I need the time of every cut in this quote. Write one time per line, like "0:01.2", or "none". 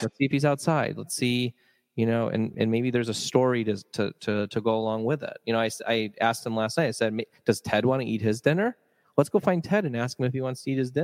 0:02.5